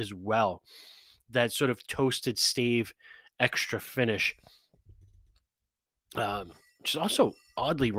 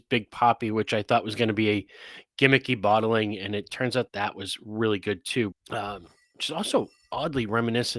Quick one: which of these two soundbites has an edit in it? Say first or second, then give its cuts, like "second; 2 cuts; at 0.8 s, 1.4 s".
second; 2 cuts; at 4.1 s, 5.5 s